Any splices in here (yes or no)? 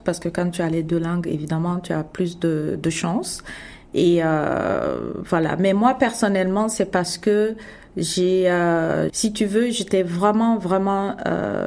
yes